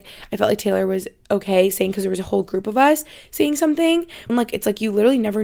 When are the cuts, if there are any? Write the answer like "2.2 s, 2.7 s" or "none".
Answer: 4.3 s

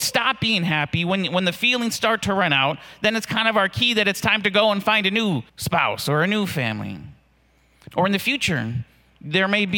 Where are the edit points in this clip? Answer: 5.5 s, 7.9 s

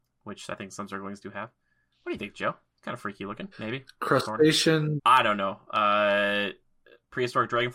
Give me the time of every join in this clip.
3.5 s, 5.0 s

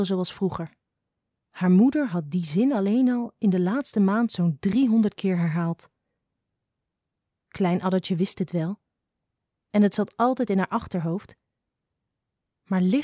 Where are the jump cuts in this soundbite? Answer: 1.4 s

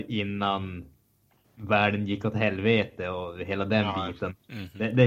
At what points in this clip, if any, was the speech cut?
none

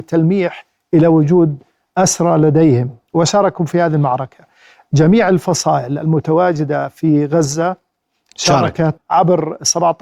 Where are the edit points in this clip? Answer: 9.0 s

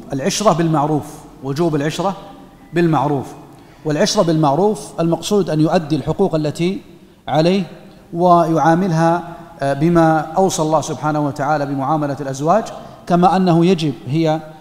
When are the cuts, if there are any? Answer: none

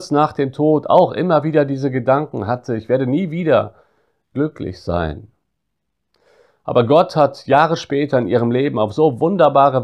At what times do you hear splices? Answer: none

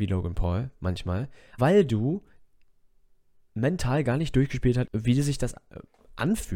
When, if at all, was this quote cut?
1.6 s, 4.9 s

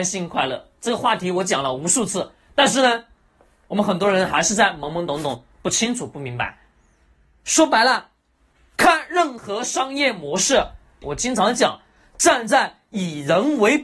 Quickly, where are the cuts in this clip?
11.0 s

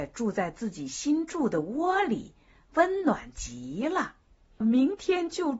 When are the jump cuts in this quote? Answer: 4.6 s

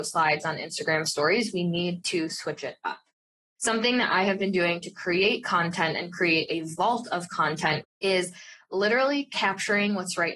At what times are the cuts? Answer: 7.8 s

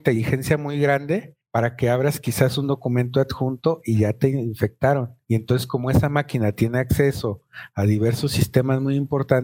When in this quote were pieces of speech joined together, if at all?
none

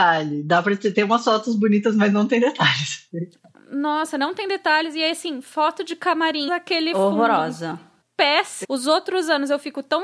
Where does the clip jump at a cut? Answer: 6.5 s, 8.6 s

